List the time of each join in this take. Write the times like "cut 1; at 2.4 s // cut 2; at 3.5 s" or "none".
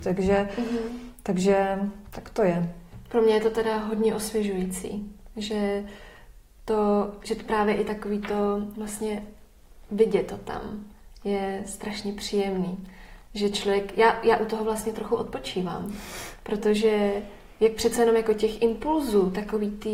none